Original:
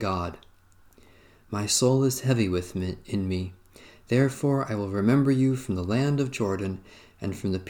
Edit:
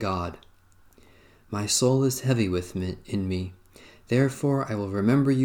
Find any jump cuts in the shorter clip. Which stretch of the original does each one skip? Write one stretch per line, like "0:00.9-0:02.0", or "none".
none